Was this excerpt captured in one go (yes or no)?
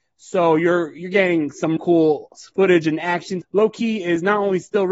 no